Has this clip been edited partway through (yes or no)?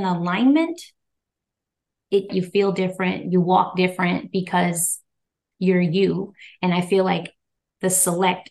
yes